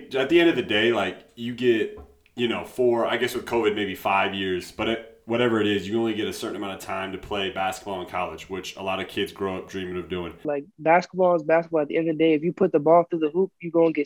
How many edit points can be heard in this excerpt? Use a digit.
1